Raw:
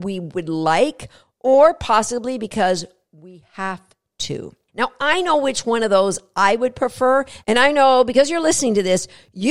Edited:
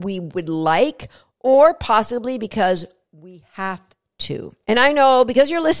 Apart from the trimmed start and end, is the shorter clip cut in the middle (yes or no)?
yes